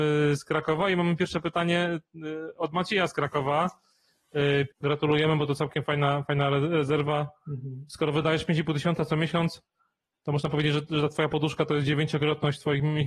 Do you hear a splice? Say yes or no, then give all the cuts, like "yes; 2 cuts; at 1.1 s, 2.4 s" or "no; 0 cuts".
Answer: yes; 1 cut; at 4.7 s